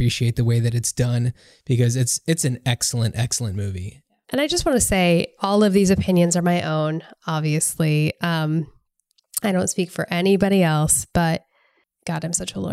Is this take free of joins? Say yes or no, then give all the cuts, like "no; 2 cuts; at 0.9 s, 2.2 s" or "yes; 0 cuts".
no; 1 cut; at 5.4 s